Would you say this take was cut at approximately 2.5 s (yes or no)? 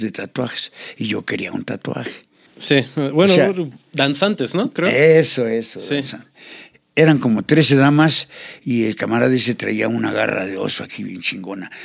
yes